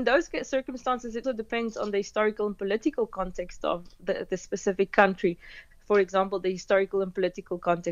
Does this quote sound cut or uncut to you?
cut